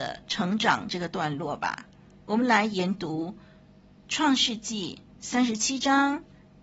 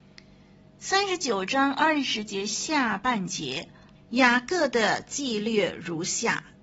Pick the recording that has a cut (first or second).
second